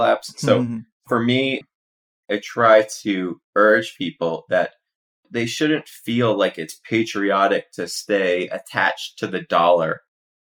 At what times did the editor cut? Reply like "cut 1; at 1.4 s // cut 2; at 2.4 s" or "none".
none